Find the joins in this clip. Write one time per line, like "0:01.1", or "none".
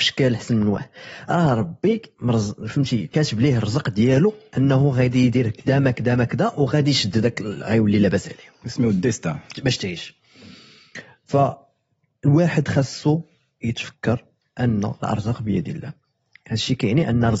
0:09.5